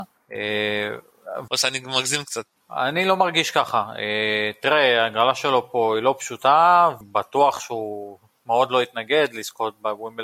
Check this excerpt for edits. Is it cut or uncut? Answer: cut